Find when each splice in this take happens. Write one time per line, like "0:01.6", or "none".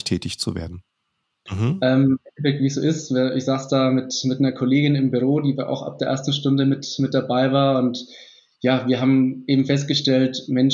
0:01.5